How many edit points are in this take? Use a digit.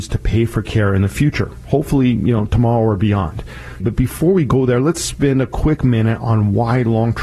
1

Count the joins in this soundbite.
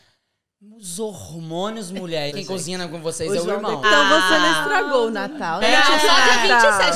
3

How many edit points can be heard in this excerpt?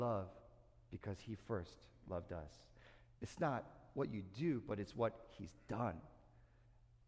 1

